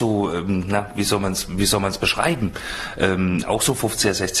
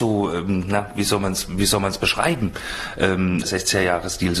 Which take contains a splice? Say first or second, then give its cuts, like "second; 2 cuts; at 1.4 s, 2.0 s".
second; 1 cut; at 3.4 s